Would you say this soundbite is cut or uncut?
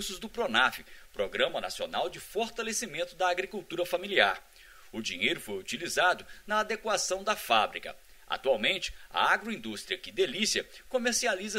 uncut